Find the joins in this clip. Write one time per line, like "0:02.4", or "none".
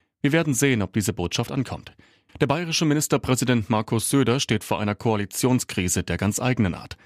0:02.3